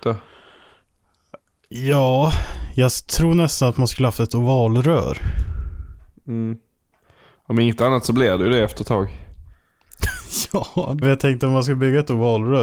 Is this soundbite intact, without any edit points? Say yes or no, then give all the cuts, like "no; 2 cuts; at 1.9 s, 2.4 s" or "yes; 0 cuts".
no; 1 cut; at 11.0 s